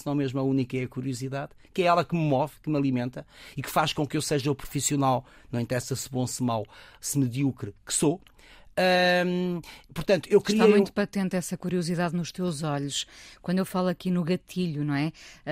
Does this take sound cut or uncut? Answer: uncut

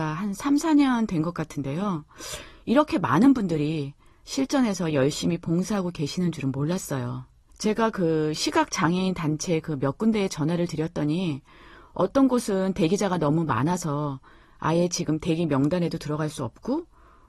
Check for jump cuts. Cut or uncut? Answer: cut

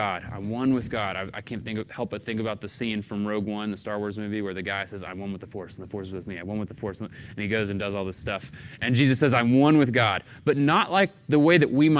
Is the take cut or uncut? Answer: uncut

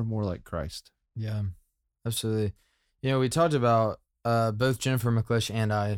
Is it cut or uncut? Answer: uncut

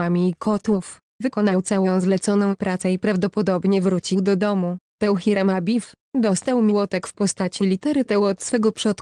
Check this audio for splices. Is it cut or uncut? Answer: uncut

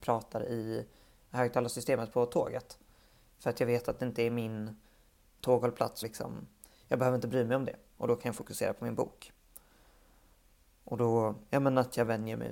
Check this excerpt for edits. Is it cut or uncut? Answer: cut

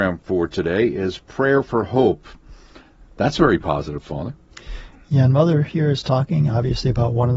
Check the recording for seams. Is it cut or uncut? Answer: uncut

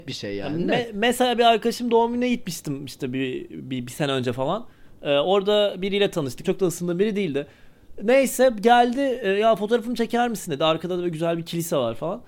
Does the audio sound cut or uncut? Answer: cut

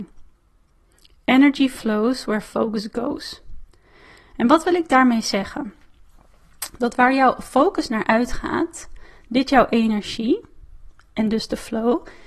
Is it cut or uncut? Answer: uncut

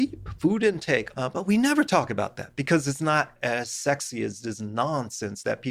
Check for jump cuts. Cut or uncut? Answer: cut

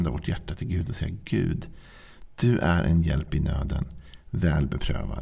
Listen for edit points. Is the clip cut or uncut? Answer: uncut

